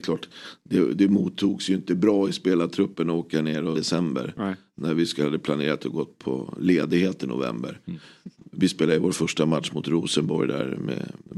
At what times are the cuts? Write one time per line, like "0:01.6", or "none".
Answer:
0:03.7